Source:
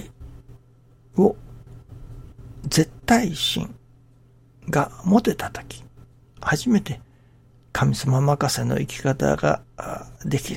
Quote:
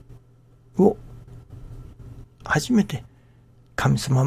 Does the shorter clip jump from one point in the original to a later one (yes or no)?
yes